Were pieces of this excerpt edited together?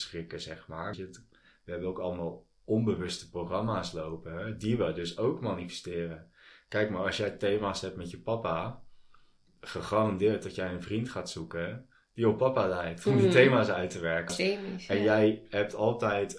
yes; 2 cuts; at 0.9 s, 14.3 s

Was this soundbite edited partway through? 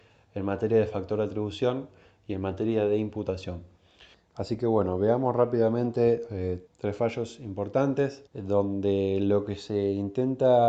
yes; 3 cuts; at 4.1 s, 6.7 s, 8.3 s

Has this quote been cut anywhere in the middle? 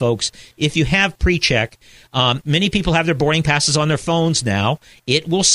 yes; 1 cut; at 2.4 s

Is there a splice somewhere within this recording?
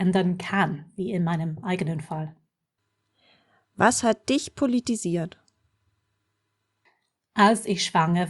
no; 0 cuts

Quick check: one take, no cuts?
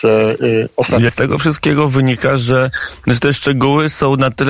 no; 1 cut; at 1.1 s

